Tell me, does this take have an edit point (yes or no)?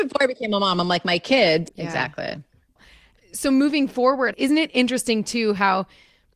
yes